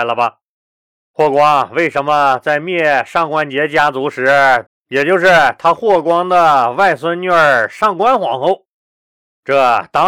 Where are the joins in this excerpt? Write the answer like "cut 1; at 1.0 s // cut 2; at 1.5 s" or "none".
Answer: cut 1; at 4.7 s